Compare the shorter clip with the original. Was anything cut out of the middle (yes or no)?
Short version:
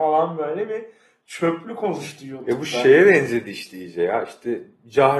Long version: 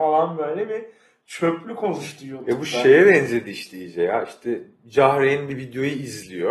no